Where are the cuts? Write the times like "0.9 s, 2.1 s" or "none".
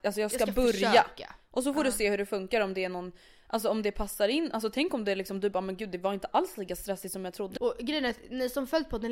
7.6 s

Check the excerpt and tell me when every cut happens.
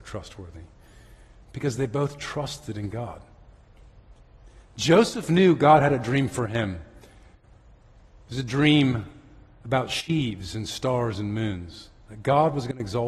none

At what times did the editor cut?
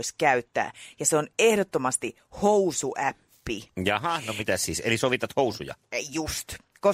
none

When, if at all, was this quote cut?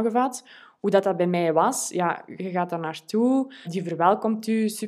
2.4 s, 3.6 s

